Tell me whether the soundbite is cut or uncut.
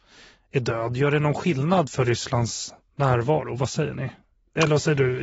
uncut